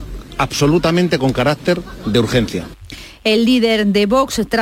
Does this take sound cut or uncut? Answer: uncut